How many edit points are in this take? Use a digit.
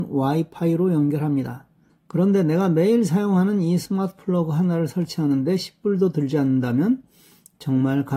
1